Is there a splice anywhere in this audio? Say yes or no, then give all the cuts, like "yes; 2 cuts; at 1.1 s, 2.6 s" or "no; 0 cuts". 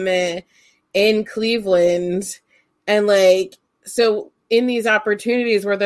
no; 0 cuts